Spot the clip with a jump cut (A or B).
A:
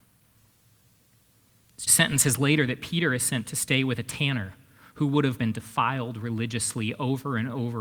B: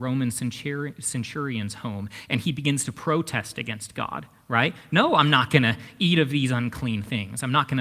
A